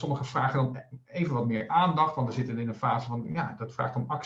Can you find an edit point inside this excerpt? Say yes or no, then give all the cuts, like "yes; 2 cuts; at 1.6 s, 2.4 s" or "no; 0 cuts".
no; 0 cuts